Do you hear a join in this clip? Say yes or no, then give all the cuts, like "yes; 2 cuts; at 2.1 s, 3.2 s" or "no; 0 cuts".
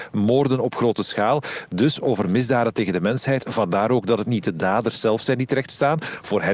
no; 0 cuts